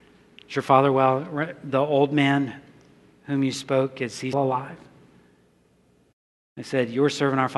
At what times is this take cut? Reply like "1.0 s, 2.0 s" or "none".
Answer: 4.3 s

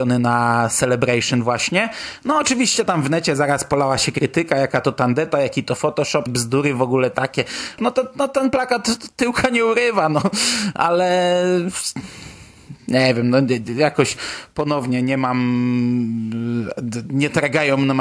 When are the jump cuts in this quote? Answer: 6.3 s, 7.8 s

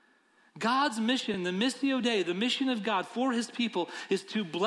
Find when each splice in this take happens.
none

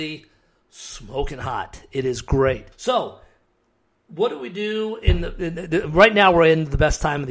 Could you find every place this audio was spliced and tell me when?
2.7 s

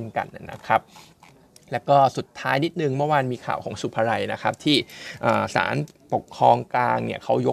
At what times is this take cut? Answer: none

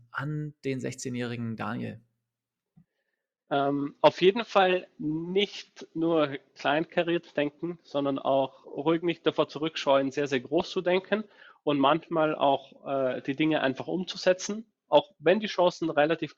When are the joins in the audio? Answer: 8.6 s

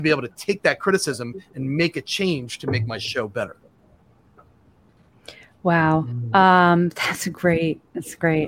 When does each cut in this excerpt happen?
none

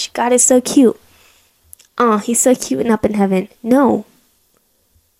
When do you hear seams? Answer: none

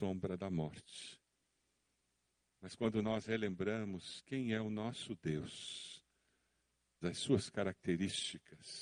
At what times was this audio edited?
2.5 s, 7.0 s

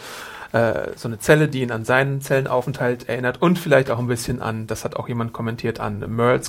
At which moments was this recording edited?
none

